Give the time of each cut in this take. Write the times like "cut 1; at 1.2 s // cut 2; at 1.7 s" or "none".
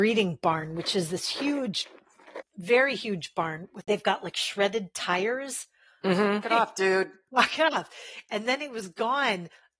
cut 1; at 6.4 s